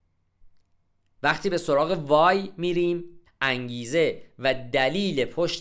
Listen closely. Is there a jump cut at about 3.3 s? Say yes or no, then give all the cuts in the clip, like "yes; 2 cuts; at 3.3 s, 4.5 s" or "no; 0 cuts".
yes; 1 cut; at 3.3 s